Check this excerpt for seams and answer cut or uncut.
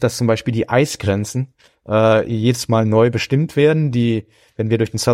uncut